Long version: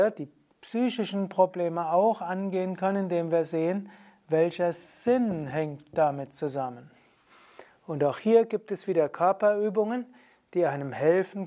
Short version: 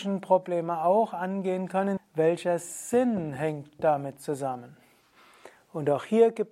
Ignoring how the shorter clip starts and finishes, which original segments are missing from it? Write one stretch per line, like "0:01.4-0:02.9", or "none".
0:03.0-0:04.1